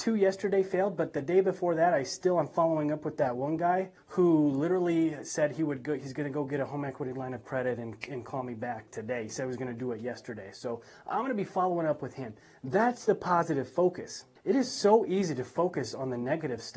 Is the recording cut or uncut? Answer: uncut